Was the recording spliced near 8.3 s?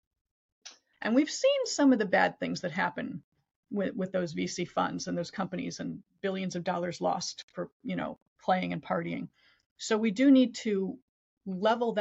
yes; 2 cuts; at 0.9 s, 8.3 s

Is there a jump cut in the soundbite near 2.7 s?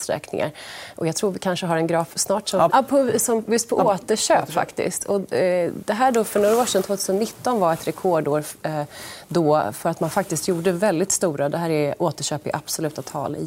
yes; 1 cut; at 2.7 s

